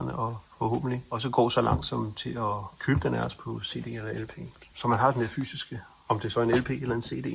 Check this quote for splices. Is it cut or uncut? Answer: uncut